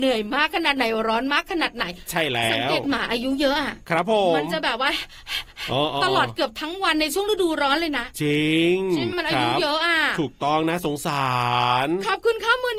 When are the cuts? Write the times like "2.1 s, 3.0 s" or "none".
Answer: 9.1 s